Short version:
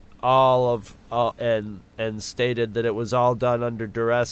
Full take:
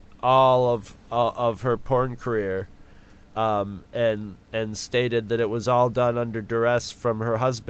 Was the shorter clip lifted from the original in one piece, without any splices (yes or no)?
no